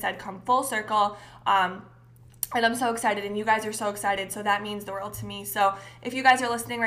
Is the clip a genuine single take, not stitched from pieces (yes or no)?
yes